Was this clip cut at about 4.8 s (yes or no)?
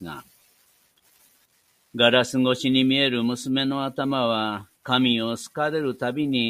yes